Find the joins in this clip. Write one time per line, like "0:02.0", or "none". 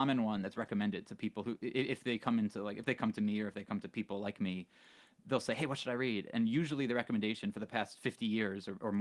none

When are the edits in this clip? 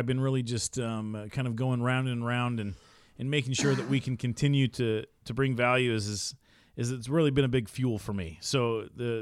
none

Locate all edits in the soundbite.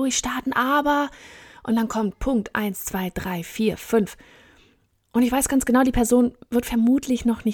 none

